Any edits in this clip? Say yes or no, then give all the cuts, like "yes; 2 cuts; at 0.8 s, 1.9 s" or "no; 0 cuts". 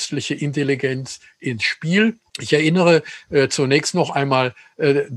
yes; 1 cut; at 2.3 s